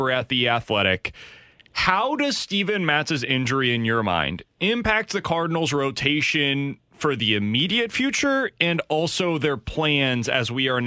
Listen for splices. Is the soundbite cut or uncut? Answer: uncut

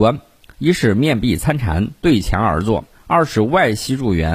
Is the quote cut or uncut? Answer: cut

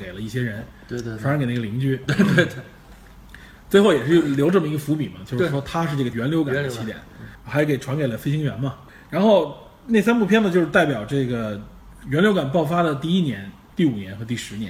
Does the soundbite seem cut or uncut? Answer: uncut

